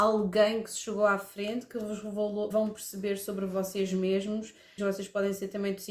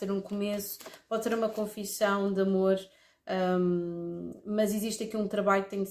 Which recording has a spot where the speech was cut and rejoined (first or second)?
first